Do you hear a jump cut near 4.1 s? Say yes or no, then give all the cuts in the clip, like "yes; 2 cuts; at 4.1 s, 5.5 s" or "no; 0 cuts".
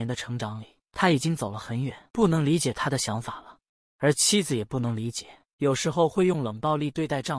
no; 2 cuts; at 2.1 s, 5.5 s